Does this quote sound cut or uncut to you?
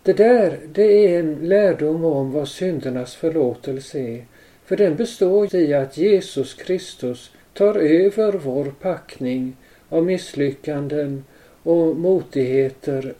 cut